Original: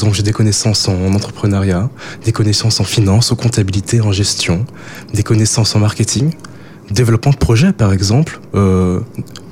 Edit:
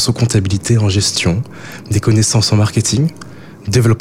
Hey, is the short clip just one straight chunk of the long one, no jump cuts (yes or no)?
yes